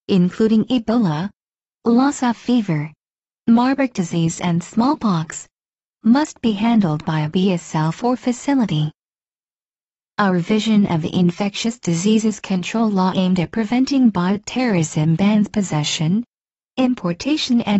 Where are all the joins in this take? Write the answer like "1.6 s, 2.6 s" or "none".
none